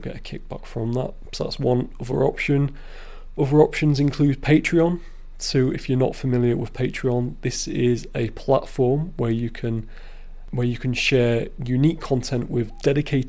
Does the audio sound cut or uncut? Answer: uncut